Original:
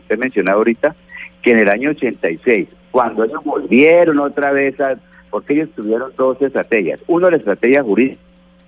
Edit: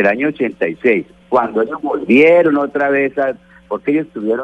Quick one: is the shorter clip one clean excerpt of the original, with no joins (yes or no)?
yes